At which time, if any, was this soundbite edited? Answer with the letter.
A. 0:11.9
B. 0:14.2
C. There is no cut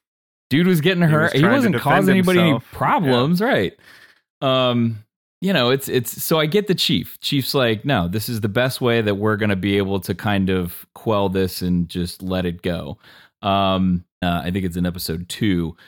B